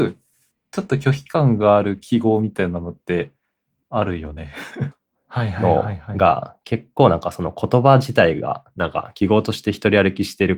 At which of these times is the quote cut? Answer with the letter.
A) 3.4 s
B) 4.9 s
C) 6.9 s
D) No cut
B